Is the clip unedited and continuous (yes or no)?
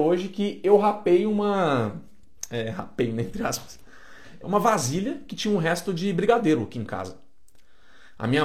no